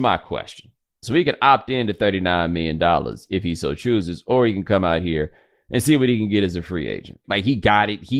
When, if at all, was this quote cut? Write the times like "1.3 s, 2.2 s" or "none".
1.0 s, 7.2 s